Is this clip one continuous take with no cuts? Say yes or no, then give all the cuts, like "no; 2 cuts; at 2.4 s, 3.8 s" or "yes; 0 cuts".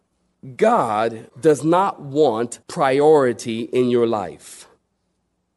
no; 2 cuts; at 1.3 s, 2.6 s